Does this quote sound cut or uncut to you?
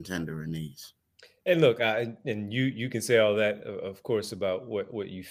uncut